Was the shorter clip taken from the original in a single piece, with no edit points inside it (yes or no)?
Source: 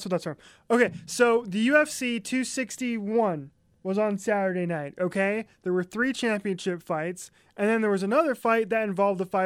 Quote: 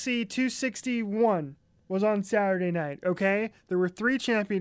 yes